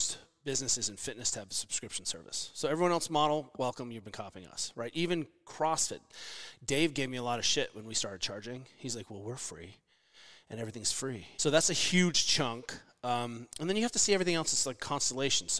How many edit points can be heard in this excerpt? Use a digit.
1